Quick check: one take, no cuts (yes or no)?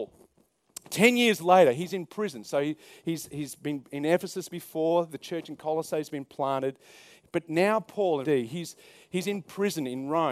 no